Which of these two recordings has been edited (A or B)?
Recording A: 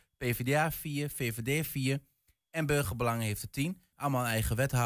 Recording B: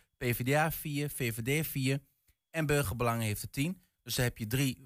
A